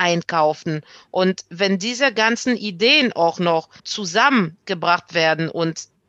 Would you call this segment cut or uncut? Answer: cut